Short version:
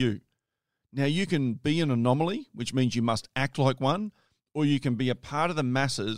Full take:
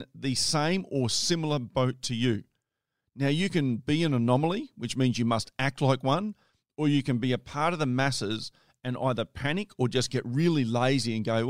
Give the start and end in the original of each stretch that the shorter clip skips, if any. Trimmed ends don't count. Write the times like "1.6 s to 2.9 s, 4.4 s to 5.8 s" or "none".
none